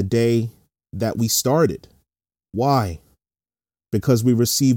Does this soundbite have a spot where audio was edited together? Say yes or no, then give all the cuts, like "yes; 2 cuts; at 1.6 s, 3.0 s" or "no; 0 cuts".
yes; 1 cut; at 2.3 s